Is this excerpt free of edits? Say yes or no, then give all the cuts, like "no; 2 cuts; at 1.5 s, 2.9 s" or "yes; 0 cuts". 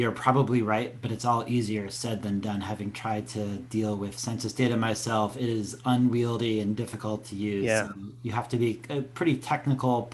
yes; 0 cuts